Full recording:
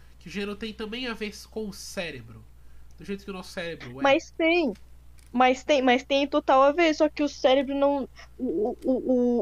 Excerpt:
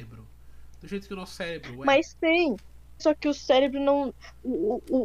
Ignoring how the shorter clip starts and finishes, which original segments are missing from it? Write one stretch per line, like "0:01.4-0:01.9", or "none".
0:05.2-0:06.9